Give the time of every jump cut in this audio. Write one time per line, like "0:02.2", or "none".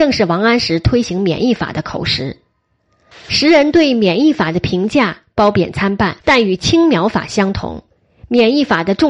0:03.1
0:06.2